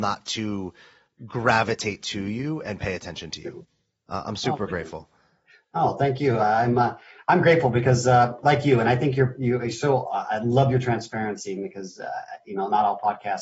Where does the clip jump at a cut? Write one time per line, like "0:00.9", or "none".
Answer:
none